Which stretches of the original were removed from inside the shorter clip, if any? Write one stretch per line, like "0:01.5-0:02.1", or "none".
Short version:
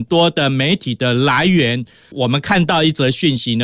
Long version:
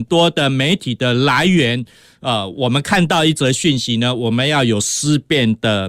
0:02.1-0:02.5

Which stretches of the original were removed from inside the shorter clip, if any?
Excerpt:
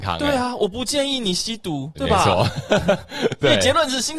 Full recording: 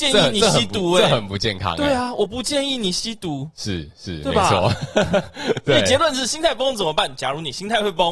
0:03.5-0:04.2

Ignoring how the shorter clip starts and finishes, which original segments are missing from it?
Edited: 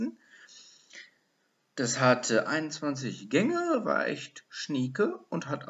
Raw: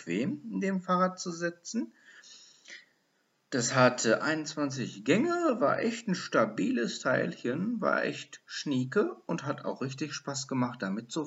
0:05.6-0:07.8

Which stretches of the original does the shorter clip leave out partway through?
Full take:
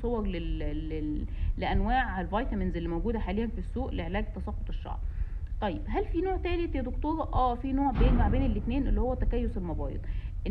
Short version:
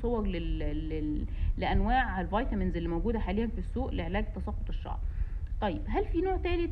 none

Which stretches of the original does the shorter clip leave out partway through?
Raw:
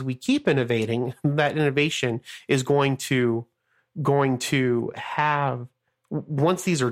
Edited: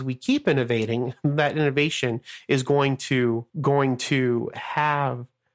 0:03.5-0:03.9

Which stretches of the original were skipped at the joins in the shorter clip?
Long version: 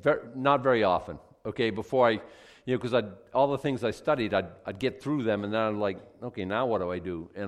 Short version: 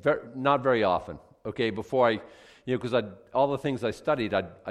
none

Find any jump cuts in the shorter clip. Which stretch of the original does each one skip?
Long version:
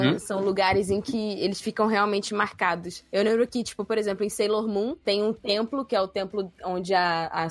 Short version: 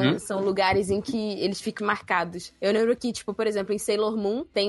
0:01.8-0:02.3

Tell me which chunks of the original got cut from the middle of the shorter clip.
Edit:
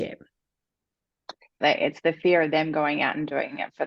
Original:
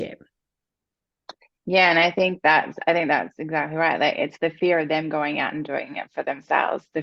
0:01.6-0:04.0

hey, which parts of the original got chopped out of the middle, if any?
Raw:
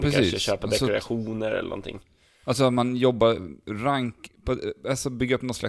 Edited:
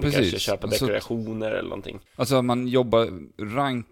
0:02.1-0:02.3

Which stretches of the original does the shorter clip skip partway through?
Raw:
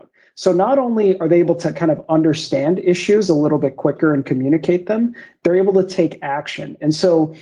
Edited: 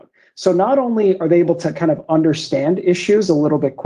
none

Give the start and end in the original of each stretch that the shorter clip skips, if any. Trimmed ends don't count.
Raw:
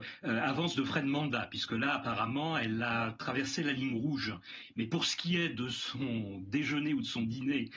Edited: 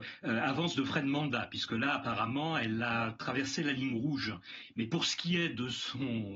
none

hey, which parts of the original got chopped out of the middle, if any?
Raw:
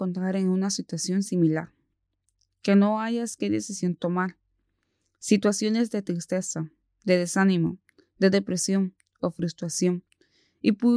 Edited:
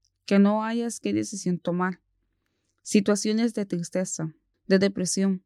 0:06.9-0:08.1

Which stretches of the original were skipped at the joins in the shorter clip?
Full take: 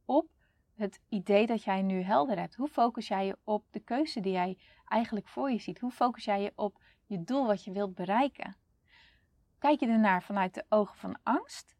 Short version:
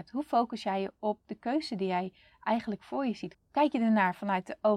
0:05.8-0:09.4

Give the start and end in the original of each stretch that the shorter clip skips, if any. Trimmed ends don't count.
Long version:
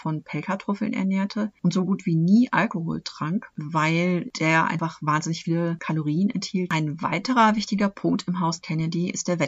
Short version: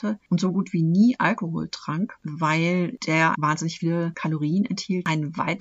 0:04.7-0:05.0

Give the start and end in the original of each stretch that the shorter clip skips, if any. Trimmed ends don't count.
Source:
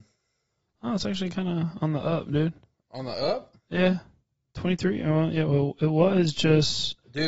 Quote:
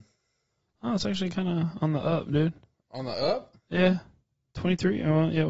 none

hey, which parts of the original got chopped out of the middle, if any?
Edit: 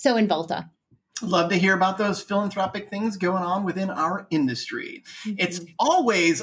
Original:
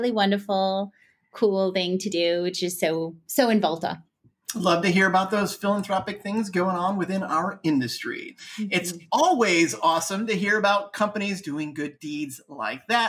none

